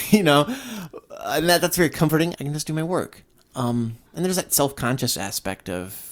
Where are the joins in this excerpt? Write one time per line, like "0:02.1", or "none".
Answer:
0:02.3
0:04.1

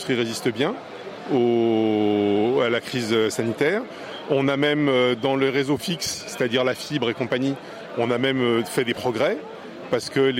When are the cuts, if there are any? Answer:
none

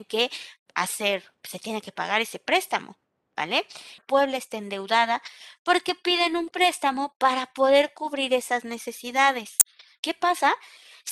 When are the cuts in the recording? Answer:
0:04.0
0:10.0

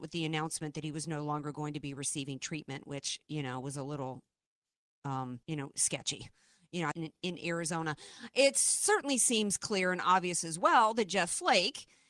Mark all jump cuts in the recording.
0:05.4
0:06.9

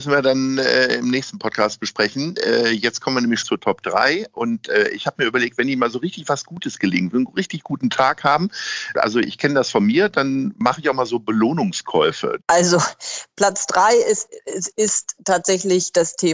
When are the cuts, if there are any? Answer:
0:03.4
0:08.9
0:12.4

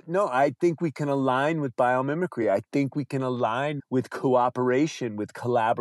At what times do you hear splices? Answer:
none

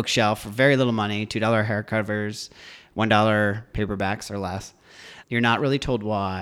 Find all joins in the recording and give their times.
0:05.2

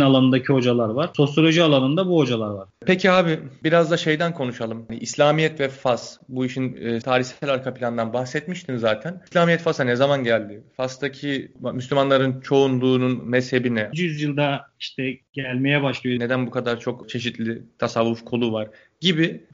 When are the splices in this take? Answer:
0:07.0
0:13.9
0:16.2

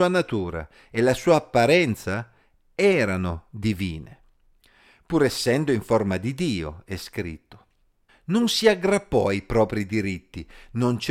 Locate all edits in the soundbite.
0:08.1

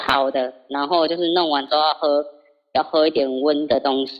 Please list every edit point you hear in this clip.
none

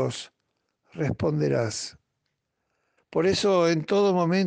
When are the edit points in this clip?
0:03.0

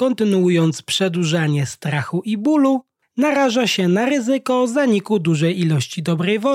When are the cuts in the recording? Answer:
none

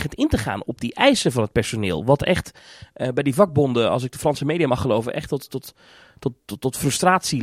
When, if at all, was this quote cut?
none

